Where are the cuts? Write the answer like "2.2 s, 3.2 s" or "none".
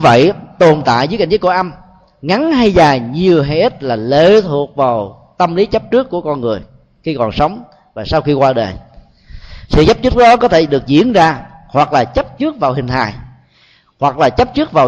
none